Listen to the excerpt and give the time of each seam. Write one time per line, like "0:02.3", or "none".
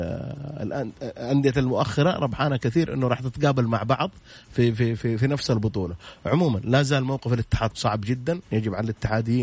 0:05.0
0:07.7